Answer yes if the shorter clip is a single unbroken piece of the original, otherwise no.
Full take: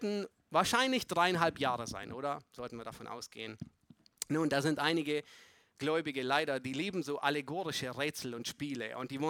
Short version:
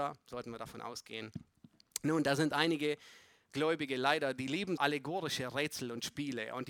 no